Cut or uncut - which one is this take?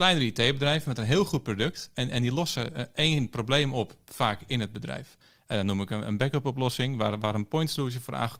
uncut